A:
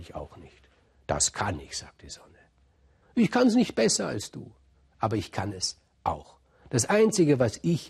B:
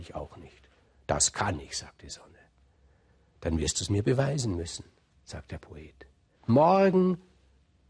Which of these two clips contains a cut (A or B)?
A